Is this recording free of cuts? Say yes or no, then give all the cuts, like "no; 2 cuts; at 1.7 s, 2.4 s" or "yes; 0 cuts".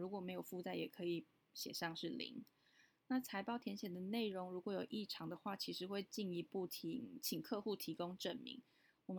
yes; 0 cuts